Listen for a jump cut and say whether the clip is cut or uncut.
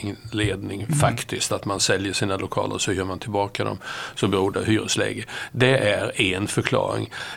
uncut